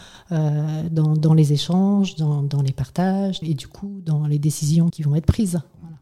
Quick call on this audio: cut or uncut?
cut